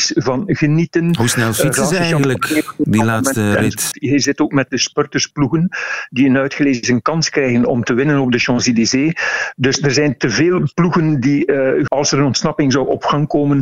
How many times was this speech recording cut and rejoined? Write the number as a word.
two